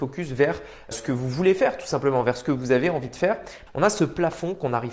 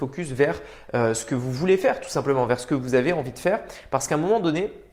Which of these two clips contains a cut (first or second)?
first